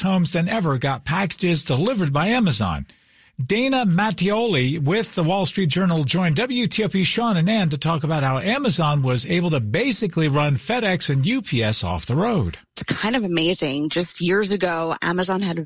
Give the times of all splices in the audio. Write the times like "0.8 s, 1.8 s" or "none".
none